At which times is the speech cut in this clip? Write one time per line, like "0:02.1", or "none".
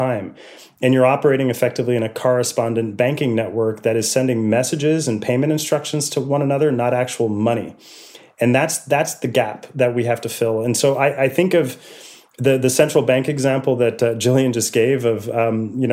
none